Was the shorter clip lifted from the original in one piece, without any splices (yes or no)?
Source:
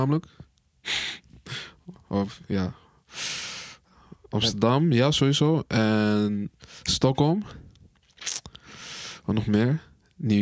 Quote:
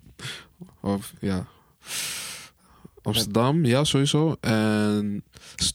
yes